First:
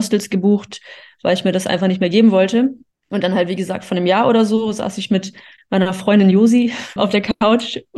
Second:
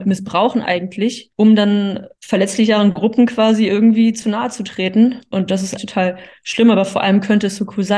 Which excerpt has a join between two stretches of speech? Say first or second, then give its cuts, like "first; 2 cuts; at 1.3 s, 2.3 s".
second; 2 cuts; at 1.3 s, 5.8 s